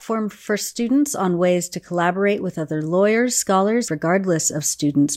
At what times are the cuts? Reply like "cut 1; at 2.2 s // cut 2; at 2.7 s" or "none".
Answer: cut 1; at 3.9 s

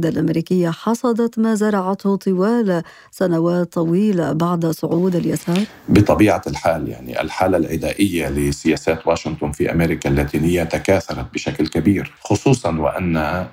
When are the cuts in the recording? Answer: cut 1; at 12.2 s

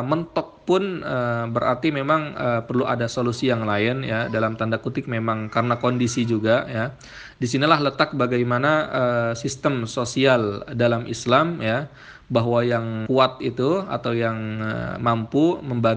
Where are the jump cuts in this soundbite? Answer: cut 1; at 13.1 s

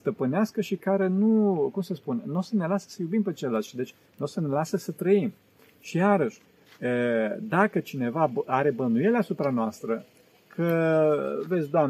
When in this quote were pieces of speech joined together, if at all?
cut 1; at 5.6 s

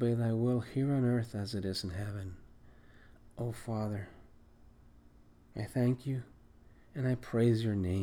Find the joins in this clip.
none

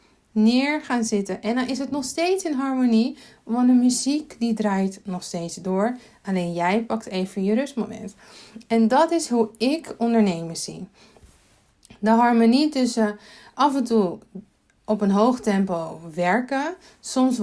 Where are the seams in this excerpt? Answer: none

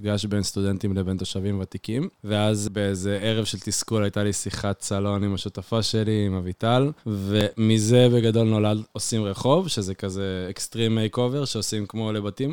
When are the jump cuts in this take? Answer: cut 1; at 7.0 s

